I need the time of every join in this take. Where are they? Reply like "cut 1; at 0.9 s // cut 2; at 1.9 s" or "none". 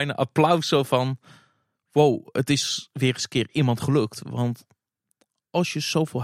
none

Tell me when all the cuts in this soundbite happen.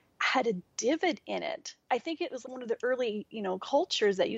cut 1; at 2.4 s

